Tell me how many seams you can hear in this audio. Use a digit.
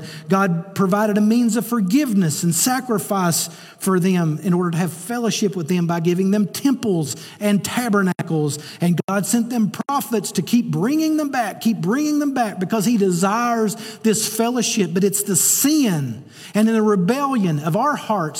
0